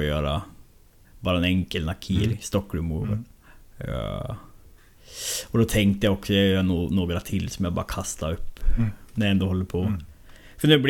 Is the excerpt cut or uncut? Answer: uncut